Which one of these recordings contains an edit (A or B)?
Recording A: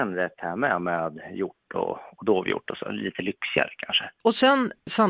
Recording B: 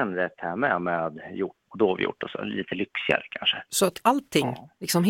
B